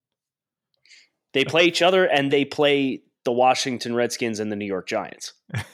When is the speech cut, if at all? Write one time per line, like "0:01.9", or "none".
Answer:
0:01.3
0:02.3

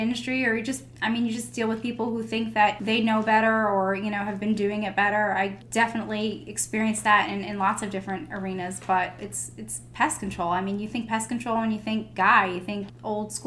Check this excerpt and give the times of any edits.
none

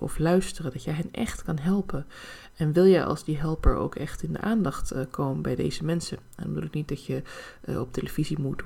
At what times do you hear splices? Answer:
none

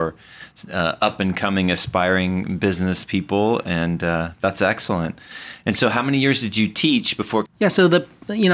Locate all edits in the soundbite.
0:07.4

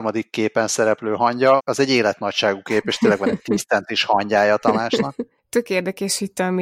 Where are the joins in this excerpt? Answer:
0:01.6

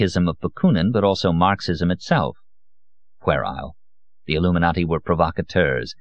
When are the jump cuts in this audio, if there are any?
none

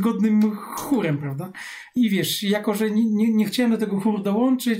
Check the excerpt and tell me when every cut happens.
0:02.0

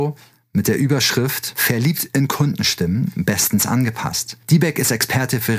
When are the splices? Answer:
none

